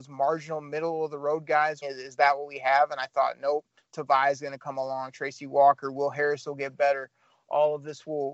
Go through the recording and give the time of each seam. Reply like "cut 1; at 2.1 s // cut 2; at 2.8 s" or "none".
cut 1; at 1.8 s